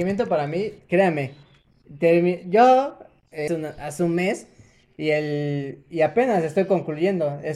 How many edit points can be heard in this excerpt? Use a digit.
1